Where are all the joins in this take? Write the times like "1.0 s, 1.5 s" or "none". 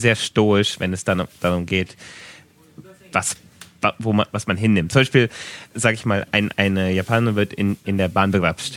none